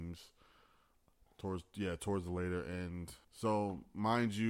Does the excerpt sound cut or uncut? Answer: cut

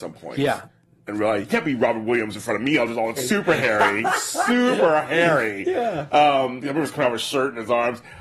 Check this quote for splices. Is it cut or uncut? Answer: cut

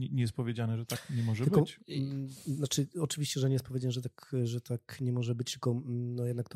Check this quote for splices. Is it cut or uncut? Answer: uncut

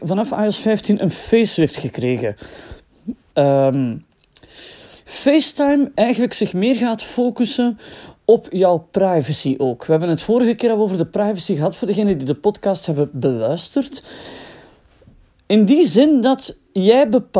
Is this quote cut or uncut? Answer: cut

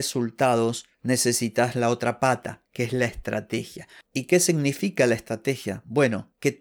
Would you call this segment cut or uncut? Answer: uncut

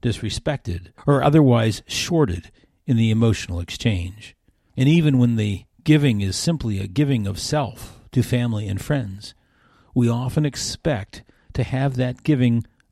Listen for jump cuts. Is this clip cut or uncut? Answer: cut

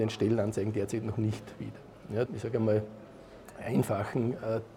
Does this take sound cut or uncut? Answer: cut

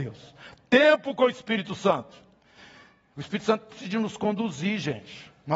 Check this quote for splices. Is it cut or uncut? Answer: uncut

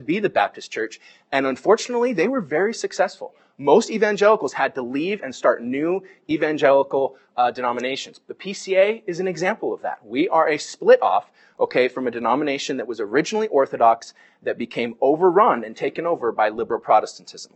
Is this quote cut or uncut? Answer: uncut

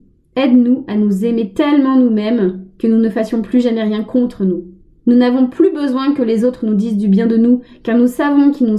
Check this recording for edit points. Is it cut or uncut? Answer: cut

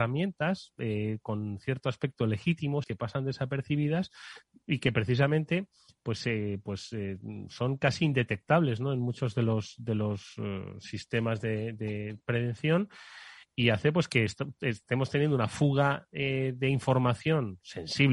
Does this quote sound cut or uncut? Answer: cut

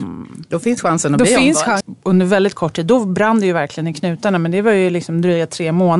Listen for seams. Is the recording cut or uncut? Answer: cut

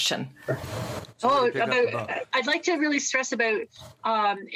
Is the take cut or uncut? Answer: uncut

